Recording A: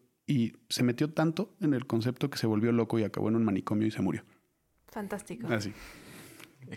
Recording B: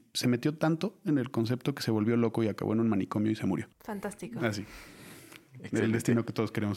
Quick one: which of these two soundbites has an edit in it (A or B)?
B